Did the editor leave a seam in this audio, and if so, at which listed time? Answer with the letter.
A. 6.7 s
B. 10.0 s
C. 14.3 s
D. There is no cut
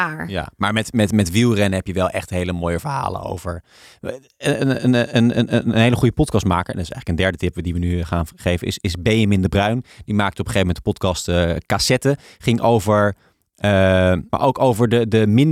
C